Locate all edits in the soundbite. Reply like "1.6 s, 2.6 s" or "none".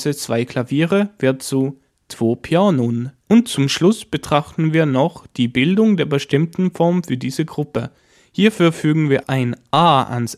3.2 s, 9.2 s